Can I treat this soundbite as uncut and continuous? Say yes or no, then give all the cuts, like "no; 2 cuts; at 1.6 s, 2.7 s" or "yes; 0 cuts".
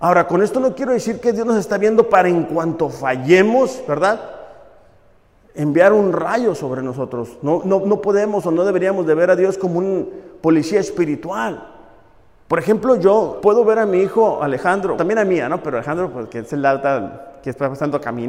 no; 2 cuts; at 13.4 s, 15.0 s